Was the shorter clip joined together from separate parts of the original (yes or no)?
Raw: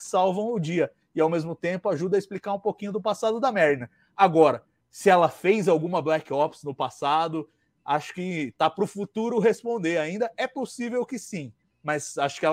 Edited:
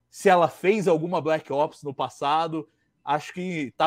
no